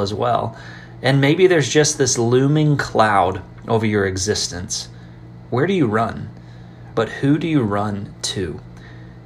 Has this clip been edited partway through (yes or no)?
yes